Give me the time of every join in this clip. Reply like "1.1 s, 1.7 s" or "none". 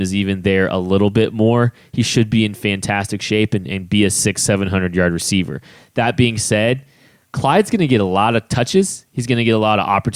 none